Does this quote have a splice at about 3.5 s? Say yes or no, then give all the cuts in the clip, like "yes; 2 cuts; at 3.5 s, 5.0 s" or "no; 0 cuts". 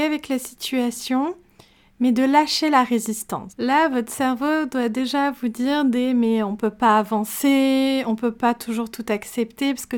yes; 1 cut; at 3.5 s